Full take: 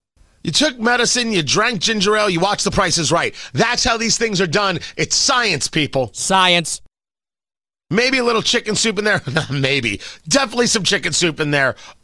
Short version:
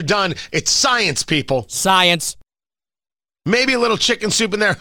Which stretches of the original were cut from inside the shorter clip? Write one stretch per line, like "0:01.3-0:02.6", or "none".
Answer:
none